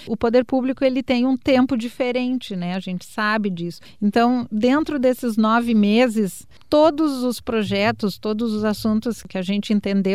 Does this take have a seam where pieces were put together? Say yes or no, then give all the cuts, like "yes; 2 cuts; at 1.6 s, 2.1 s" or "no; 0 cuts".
no; 0 cuts